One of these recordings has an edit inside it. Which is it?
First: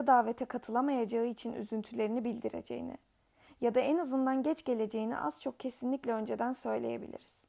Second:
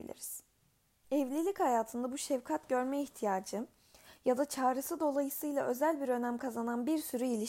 second; 1 cut; at 1.0 s

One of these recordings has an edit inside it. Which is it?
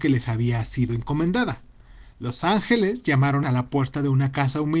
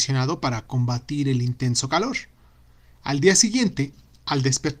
first; 2 cuts; at 2.1 s, 3.4 s

